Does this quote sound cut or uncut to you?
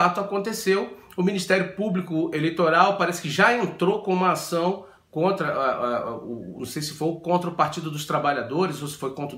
uncut